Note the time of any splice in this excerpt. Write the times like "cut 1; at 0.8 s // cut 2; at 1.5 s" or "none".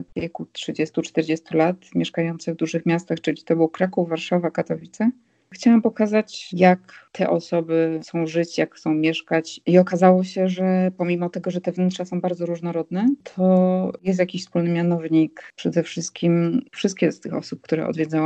none